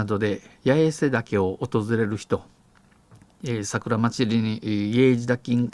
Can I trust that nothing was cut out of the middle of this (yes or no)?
yes